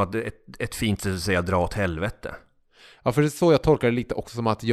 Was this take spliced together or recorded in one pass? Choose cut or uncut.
uncut